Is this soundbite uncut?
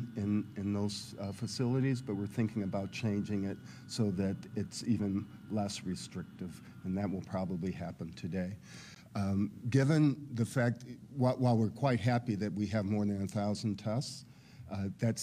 yes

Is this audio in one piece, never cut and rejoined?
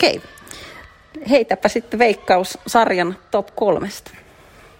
yes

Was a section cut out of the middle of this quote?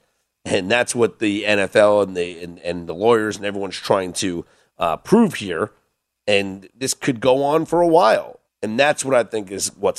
yes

